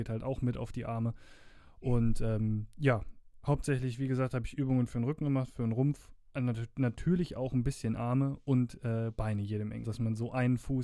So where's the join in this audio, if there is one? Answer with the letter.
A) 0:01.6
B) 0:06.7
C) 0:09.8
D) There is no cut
C